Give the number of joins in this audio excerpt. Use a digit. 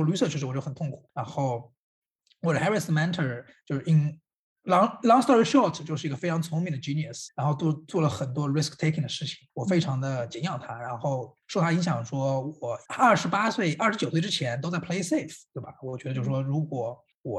1